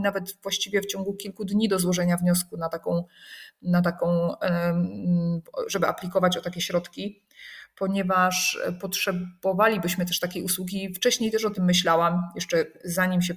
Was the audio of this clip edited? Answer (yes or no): no